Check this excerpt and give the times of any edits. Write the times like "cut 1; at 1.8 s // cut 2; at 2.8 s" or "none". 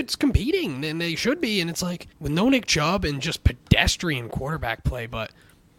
cut 1; at 2.1 s